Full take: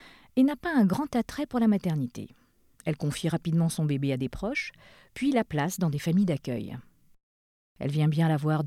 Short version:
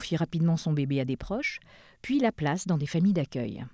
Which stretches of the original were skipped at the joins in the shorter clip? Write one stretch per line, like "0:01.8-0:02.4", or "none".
none

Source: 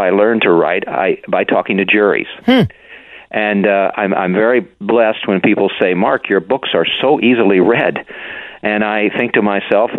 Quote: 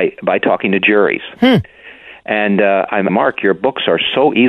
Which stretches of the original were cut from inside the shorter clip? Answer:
0:04.1-0:06.0

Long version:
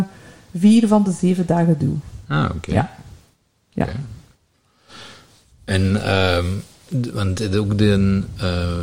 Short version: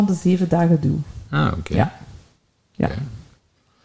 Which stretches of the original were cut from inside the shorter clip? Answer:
none

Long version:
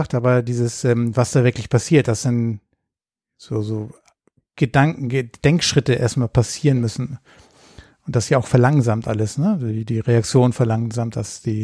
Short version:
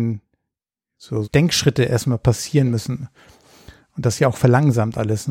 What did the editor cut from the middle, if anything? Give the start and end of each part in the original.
0:03.6-0:05.3

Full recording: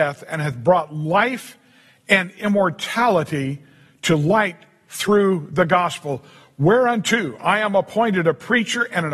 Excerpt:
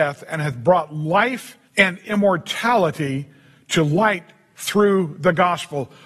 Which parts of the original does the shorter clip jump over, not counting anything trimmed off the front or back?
0:01.7-0:02.0

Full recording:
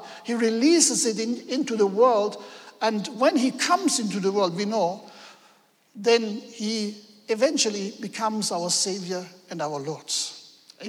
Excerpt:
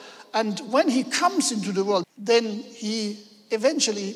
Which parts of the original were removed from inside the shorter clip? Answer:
0:04.5-0:05.8

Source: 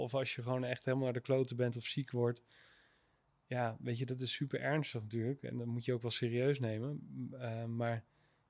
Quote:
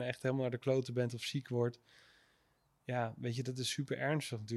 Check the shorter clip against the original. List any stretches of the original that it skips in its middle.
none

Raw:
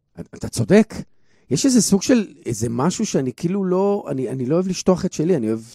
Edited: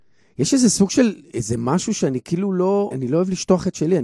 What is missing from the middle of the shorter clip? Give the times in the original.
0:04.0-0:04.3

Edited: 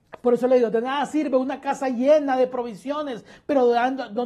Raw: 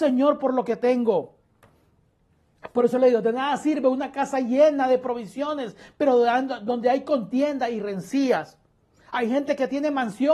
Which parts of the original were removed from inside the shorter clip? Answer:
none

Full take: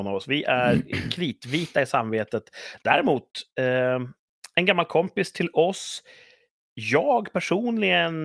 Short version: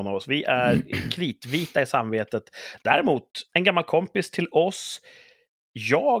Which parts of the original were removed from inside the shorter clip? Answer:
0:03.5-0:04.5

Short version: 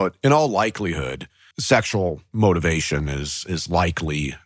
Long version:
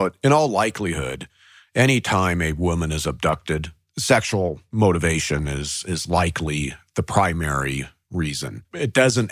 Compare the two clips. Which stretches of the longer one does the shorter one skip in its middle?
0:01.5-0:03.9

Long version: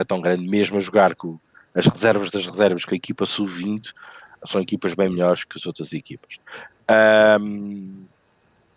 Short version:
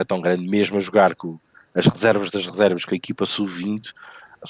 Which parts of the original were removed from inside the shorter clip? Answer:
none

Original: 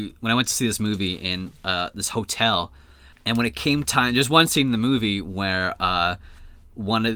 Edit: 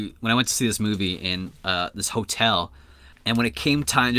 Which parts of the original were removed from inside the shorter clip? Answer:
none

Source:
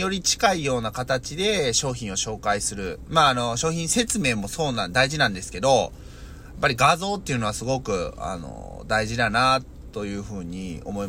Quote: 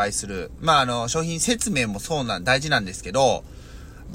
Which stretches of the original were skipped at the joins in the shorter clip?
none

